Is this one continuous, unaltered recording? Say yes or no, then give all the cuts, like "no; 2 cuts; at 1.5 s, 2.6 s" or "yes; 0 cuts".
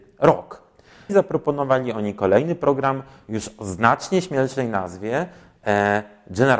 no; 1 cut; at 1.1 s